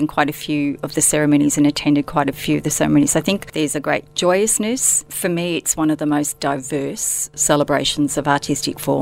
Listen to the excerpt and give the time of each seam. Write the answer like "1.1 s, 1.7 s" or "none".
none